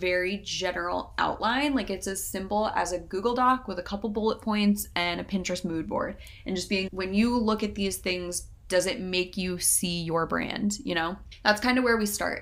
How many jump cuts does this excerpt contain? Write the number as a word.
one